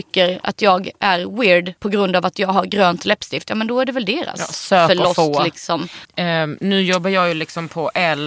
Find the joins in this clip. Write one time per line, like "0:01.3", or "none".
0:01.8
0:06.1